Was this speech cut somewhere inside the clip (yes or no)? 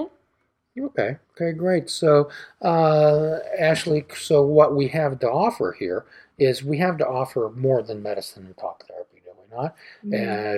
yes